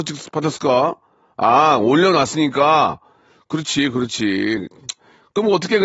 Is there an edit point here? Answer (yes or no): no